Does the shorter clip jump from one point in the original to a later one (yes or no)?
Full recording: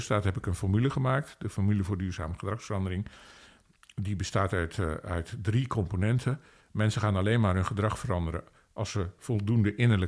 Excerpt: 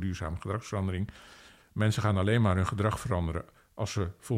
yes